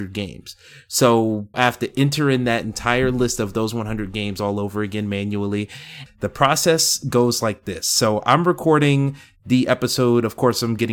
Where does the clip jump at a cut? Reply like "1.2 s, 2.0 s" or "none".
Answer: 1.5 s, 6.1 s

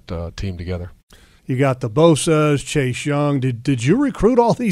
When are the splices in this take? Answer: 1.4 s

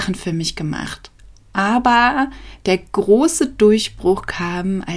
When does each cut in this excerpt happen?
none

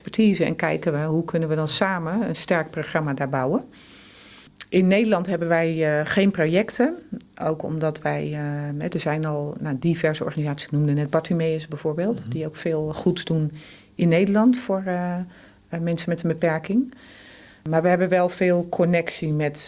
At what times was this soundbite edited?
none

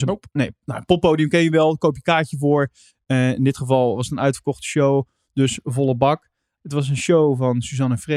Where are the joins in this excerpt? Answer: 6.6 s

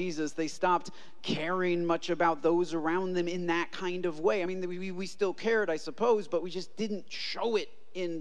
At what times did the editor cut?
none

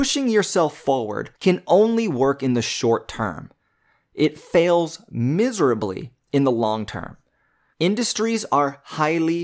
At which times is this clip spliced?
1.3 s, 7.7 s

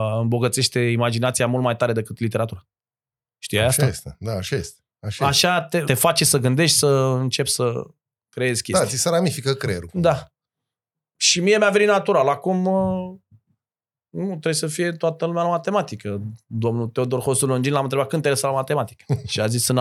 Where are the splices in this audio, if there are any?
5.8 s

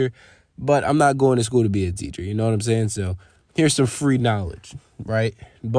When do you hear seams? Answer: none

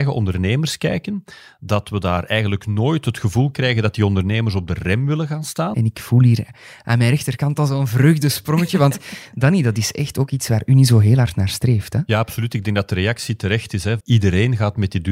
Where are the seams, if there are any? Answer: 5.7 s, 14.0 s

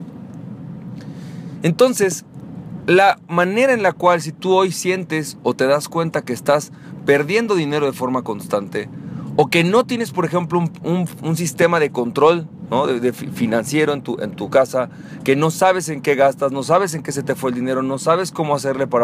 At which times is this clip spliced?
none

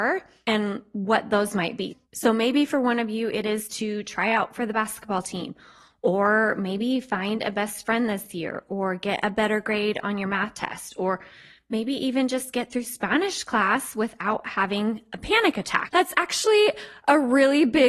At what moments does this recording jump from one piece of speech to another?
none

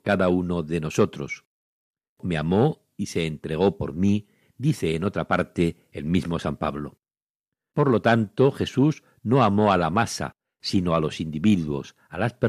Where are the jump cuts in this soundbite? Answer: none

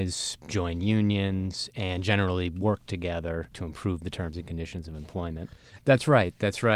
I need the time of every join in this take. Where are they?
3.5 s, 5.8 s

